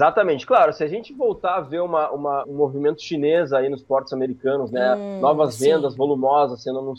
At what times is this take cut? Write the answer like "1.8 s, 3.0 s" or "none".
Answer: 2.4 s